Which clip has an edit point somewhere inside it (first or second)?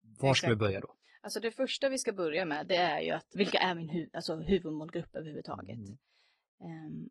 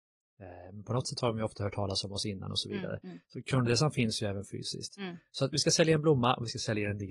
first